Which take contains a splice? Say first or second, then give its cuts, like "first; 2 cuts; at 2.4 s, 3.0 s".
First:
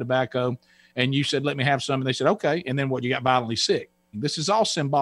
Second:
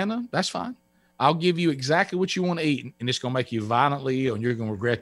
first; 1 cut; at 4.1 s